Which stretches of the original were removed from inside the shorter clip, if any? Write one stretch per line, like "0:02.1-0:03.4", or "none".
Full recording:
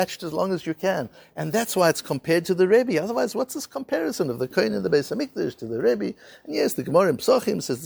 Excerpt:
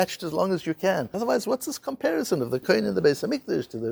0:01.1-0:03.0

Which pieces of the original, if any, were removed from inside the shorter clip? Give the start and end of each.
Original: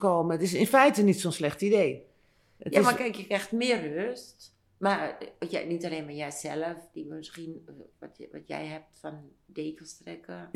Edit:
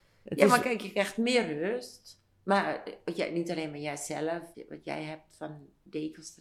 0:06.9-0:08.2

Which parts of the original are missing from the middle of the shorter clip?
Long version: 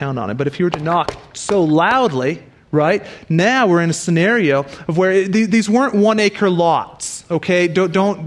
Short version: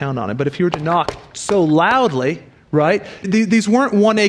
0:03.2-0:05.3

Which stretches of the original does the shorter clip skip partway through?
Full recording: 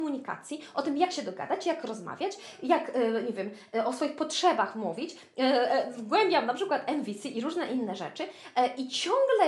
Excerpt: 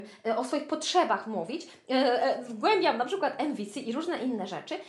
none

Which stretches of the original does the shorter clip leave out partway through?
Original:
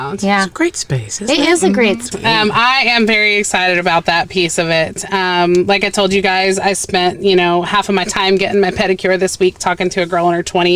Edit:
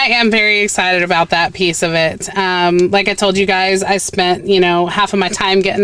none

